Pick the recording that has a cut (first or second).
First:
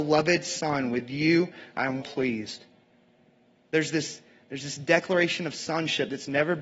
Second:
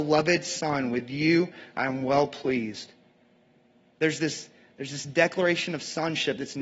first